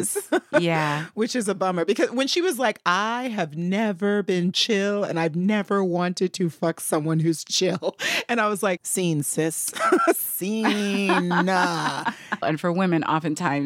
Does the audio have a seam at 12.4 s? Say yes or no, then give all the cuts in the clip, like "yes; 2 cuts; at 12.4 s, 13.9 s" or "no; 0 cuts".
yes; 2 cuts; at 8.8 s, 12.4 s